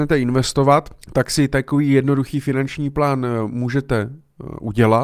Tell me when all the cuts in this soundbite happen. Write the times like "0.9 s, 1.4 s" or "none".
1.0 s